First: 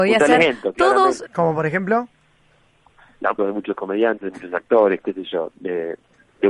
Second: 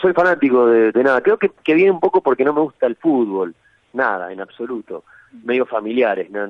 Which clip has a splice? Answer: first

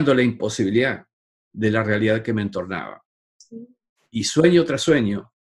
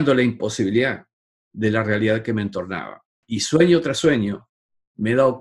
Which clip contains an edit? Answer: second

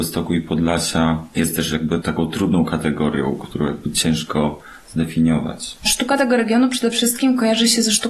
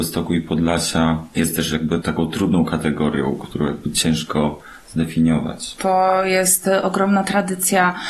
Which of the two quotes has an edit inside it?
second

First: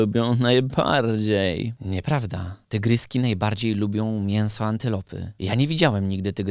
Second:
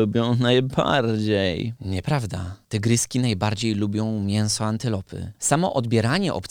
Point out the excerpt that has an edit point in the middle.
second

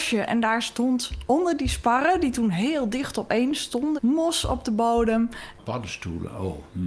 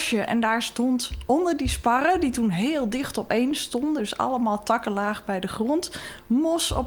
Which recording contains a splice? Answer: first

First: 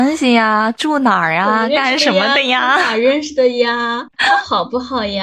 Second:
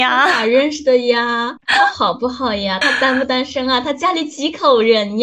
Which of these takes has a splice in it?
second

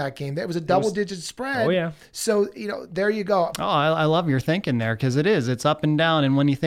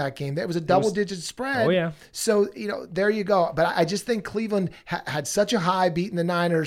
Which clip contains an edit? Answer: first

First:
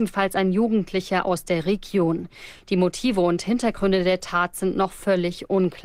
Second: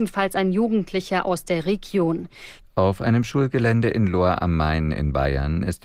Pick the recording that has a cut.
second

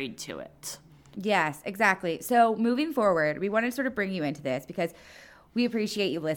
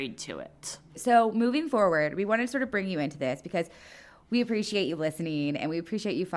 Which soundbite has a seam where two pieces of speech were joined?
second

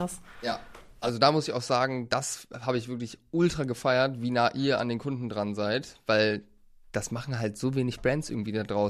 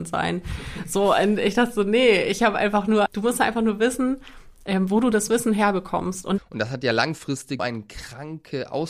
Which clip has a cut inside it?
second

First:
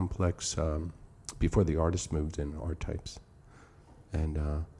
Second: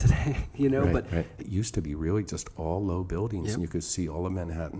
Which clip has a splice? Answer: second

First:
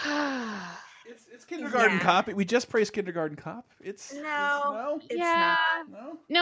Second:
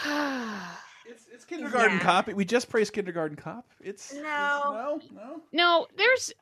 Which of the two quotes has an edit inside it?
second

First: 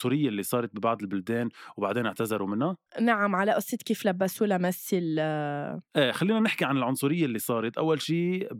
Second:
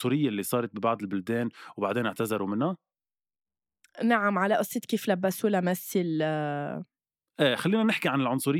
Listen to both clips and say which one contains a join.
first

